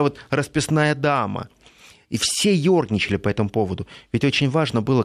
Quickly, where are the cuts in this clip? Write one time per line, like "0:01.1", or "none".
none